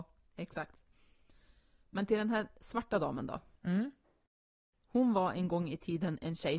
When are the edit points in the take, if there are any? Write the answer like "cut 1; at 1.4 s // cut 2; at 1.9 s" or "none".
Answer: none